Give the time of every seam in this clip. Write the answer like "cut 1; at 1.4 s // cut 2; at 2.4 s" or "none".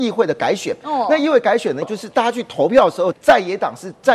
cut 1; at 1.8 s // cut 2; at 3.1 s